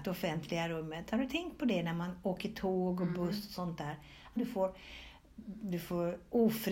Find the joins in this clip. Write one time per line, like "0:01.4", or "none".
0:04.4